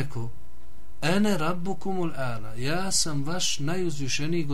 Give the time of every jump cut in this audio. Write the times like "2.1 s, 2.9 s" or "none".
none